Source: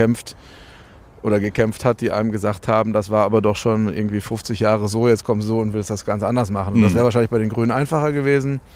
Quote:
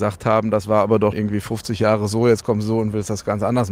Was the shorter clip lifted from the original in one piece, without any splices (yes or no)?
no